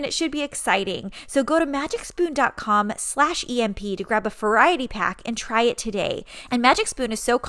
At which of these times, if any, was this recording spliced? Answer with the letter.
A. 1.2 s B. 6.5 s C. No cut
B